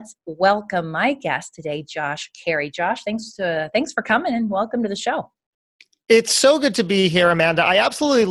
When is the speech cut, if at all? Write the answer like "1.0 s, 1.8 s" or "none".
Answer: none